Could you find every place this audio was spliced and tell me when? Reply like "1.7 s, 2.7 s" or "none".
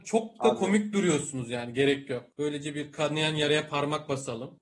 2.3 s